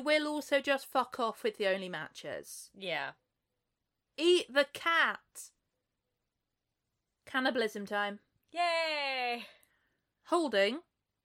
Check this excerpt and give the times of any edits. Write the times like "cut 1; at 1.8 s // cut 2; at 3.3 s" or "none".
cut 1; at 4.1 s

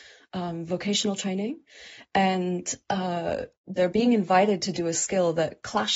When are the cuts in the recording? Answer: cut 1; at 3.8 s

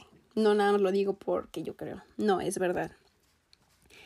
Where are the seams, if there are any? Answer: none

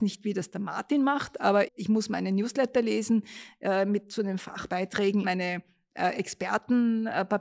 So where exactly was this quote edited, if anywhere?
cut 1; at 1.7 s // cut 2; at 5.2 s

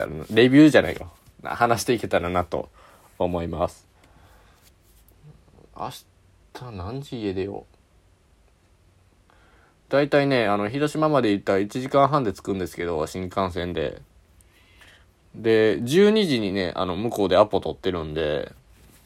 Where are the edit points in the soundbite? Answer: none

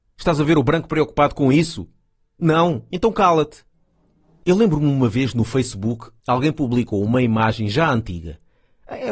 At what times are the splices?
none

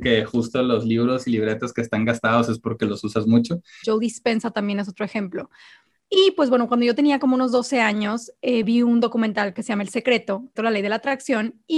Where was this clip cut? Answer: cut 1; at 3.8 s // cut 2; at 10.6 s

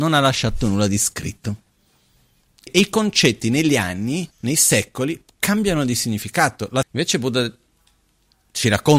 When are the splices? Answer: cut 1; at 2.7 s // cut 2; at 4.3 s // cut 3; at 6.8 s

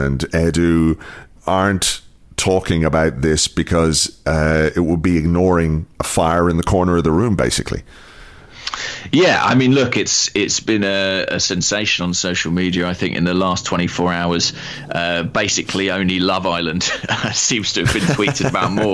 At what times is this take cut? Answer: cut 1; at 1.4 s // cut 2; at 5.9 s

